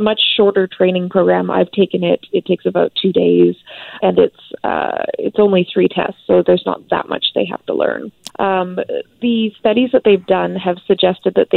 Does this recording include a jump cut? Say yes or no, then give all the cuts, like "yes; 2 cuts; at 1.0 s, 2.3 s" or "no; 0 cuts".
yes; 2 cuts; at 4.0 s, 8.3 s